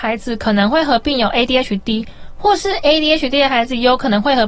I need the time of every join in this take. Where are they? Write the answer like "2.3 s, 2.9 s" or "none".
none

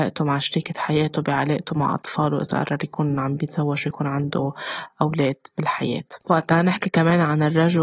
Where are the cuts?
6.2 s

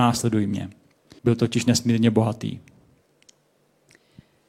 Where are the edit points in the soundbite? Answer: 1.2 s

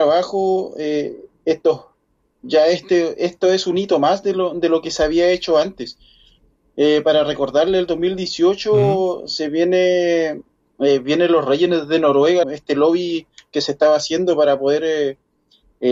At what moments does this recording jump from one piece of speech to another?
12.4 s

